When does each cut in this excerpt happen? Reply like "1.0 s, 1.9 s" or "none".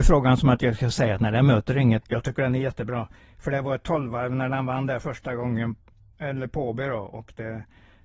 2.0 s